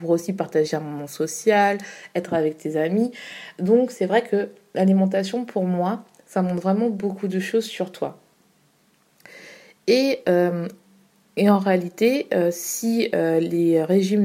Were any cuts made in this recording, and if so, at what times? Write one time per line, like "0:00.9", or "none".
none